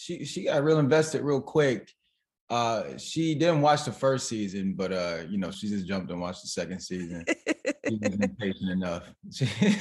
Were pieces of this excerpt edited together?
no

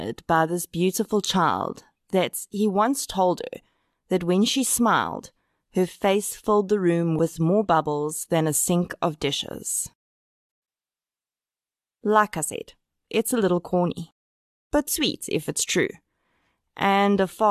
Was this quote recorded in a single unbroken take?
yes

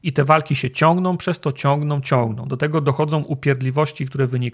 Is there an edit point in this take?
no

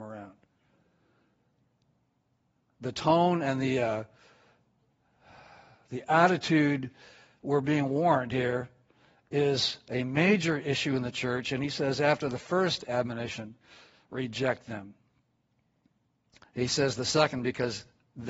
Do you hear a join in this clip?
no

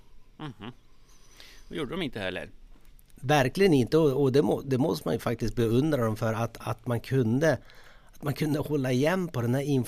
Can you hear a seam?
no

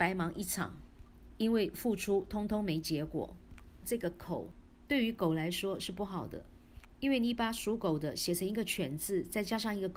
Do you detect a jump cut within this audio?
yes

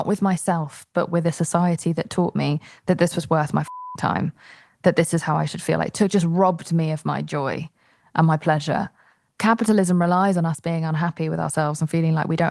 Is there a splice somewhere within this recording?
no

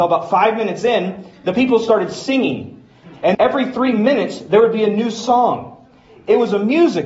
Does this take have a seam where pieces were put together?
yes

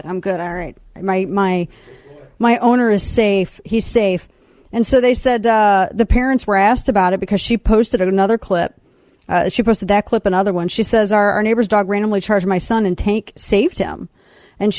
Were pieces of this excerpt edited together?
no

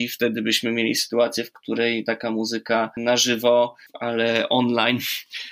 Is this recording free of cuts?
yes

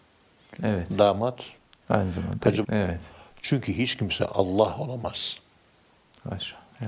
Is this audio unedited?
no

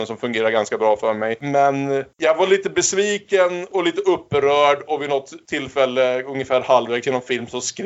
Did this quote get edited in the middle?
no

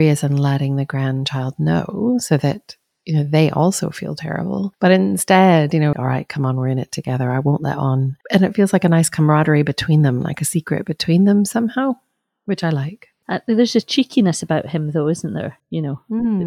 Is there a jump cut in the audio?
yes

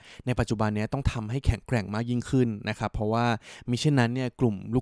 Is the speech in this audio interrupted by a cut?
no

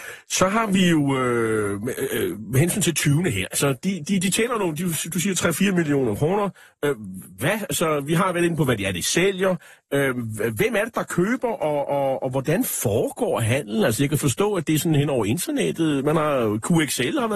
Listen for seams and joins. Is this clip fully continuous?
yes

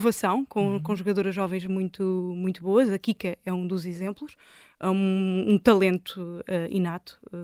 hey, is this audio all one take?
yes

